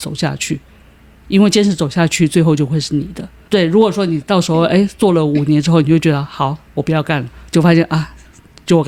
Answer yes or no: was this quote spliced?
no